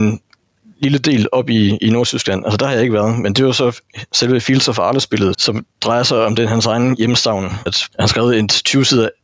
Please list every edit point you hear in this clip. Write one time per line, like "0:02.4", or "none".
0:05.3
0:07.7